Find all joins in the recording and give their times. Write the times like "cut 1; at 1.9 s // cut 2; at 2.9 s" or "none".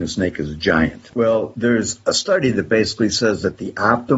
cut 1; at 1.1 s